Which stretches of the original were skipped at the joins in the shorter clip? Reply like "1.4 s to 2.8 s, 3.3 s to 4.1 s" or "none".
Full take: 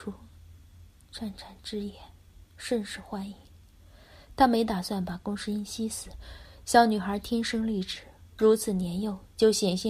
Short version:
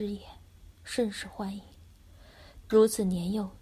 4.3 s to 8.3 s